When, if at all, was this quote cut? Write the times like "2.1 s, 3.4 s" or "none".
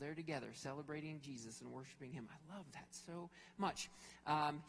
none